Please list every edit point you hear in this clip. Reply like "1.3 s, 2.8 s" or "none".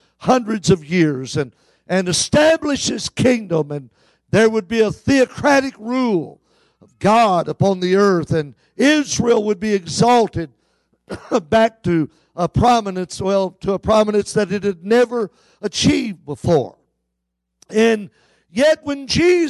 none